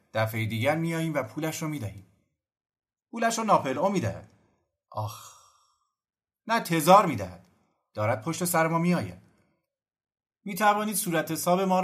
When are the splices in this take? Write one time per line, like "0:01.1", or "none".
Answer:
none